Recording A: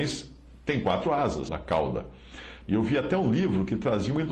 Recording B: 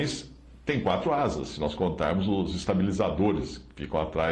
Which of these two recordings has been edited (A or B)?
A